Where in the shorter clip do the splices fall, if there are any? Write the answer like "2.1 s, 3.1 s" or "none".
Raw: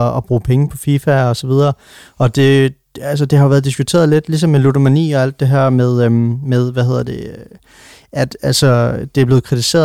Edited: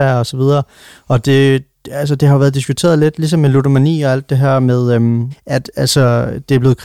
5.3 s